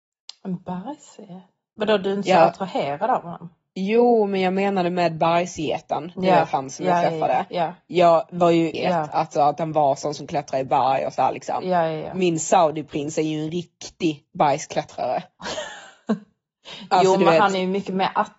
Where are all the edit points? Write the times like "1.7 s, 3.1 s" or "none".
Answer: 8.7 s